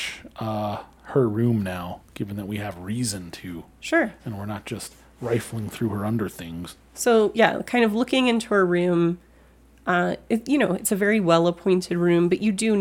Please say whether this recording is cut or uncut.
uncut